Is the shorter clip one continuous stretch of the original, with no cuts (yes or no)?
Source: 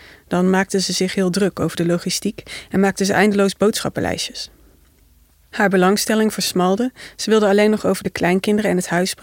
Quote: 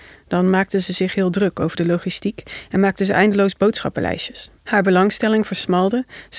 no